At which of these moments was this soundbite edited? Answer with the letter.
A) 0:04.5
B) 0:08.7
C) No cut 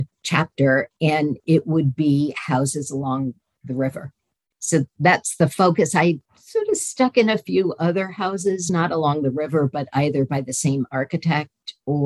C